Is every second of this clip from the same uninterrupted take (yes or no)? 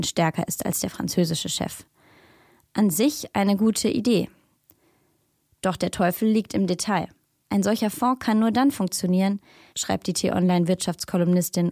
no